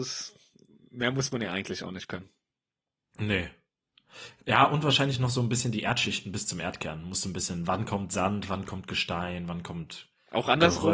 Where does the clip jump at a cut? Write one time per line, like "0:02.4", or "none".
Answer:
none